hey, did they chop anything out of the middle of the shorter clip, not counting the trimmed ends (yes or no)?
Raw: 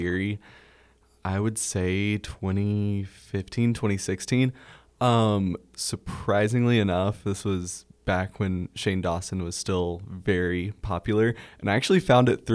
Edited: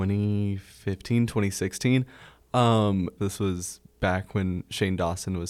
yes